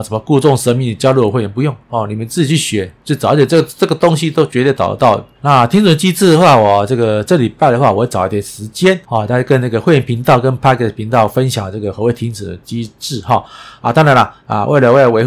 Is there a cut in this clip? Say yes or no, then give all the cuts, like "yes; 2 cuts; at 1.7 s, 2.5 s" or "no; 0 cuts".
yes; 2 cuts; at 5.4 s, 9.0 s